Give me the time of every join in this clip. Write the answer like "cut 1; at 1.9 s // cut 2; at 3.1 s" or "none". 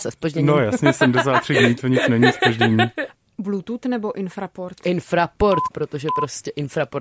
cut 1; at 5.7 s